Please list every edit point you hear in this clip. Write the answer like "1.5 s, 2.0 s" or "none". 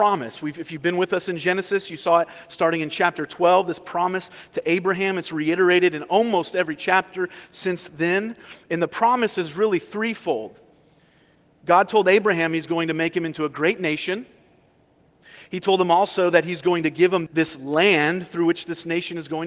17.3 s